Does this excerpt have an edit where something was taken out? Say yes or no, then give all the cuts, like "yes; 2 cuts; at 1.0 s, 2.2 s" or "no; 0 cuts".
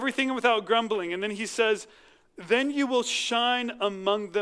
no; 0 cuts